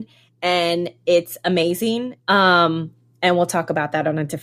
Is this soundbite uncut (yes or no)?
no